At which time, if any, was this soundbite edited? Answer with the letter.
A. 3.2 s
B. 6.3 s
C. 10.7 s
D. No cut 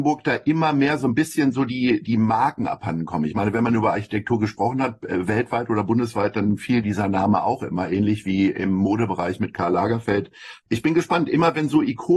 C